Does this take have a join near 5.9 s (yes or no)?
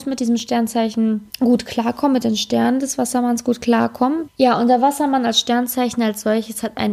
no